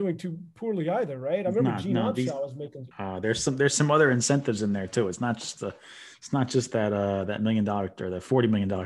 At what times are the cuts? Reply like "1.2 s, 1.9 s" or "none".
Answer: 2.9 s